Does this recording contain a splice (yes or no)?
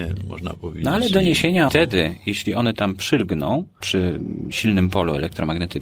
yes